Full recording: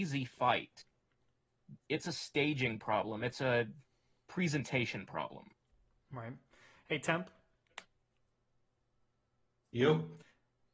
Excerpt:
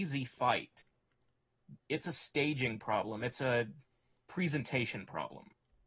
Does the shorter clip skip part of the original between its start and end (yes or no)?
no